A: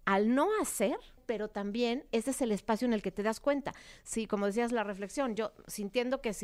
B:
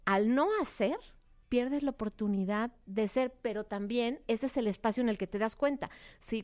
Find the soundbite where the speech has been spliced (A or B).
A